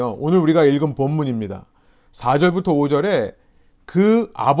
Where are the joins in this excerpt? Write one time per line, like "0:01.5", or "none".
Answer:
none